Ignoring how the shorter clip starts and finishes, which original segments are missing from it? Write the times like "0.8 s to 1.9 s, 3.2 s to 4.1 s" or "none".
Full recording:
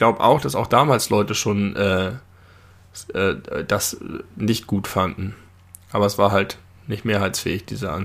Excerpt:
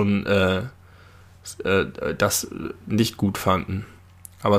none